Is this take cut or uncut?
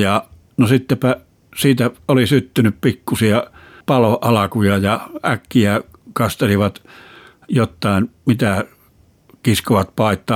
uncut